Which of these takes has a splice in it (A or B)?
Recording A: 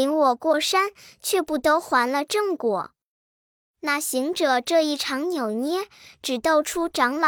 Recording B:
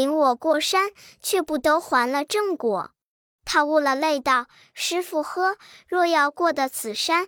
B